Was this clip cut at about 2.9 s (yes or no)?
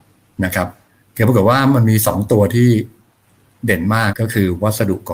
no